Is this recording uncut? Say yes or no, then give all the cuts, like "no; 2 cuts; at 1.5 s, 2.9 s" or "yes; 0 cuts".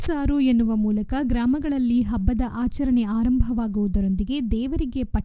yes; 0 cuts